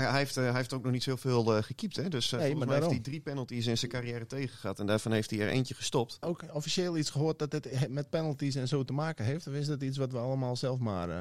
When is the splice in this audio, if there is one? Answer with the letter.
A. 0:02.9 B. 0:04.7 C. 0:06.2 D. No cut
C